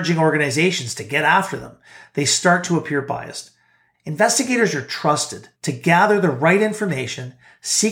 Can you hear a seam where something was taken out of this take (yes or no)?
yes